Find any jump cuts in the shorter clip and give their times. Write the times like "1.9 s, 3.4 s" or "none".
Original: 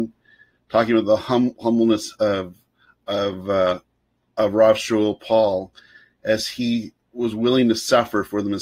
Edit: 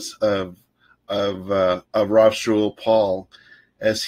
1.9 s